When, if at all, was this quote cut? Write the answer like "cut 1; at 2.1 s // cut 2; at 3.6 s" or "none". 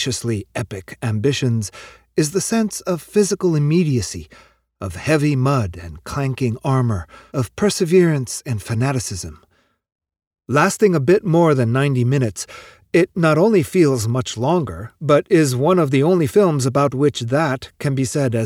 cut 1; at 7.3 s

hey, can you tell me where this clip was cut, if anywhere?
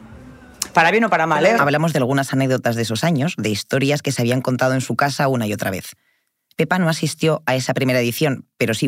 cut 1; at 1.6 s // cut 2; at 6.5 s

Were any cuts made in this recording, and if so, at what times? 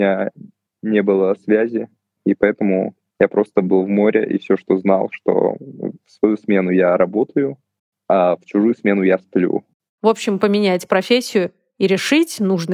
cut 1; at 9.9 s

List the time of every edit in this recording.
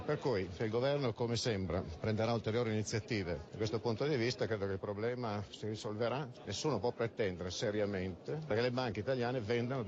none

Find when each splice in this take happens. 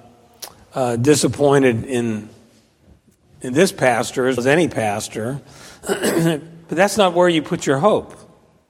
cut 1; at 4.4 s

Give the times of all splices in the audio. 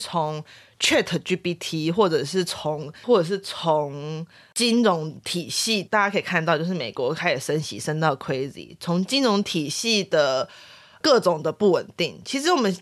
cut 1; at 3.0 s

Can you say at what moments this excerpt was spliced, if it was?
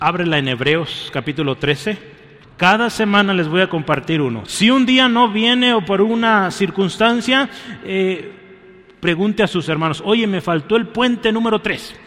cut 1; at 2.4 s // cut 2; at 4.5 s

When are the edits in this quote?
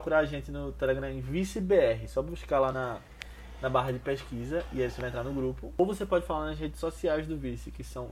none

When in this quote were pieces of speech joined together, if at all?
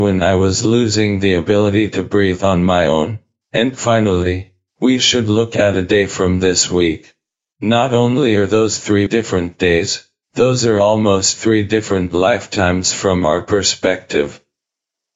cut 1; at 9.1 s

